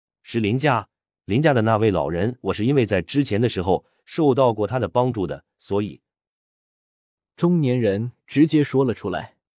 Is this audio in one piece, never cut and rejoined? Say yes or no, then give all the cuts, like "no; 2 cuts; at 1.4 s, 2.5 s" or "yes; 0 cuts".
yes; 0 cuts